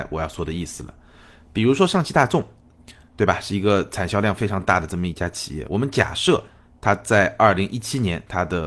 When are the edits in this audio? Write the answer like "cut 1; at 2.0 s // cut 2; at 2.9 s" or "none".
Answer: none